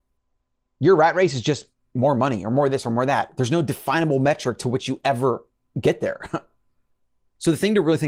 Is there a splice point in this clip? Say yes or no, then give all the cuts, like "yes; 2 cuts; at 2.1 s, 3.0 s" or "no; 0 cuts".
no; 0 cuts